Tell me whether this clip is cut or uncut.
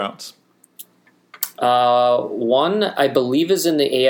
uncut